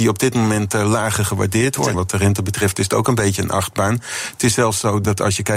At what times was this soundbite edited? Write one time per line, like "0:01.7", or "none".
0:01.9

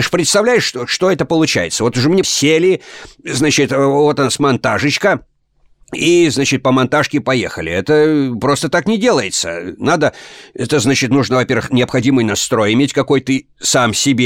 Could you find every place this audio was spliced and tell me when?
0:02.2

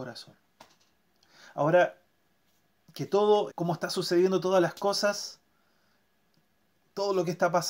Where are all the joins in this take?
0:03.5

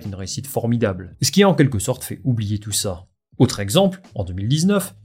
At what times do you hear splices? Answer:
none

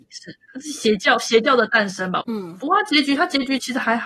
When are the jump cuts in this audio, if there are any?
0:02.2

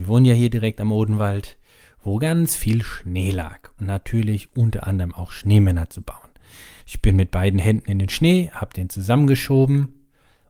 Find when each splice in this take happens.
0:03.8
0:06.8

